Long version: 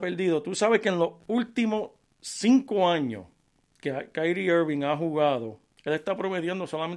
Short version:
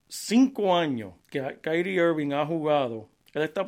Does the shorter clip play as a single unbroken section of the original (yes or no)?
no